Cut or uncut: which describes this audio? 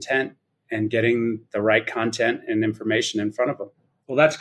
uncut